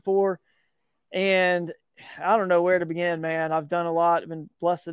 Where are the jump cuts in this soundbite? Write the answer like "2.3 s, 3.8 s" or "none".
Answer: none